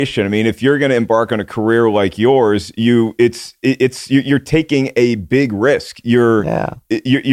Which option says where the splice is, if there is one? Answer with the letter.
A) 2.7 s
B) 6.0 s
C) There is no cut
C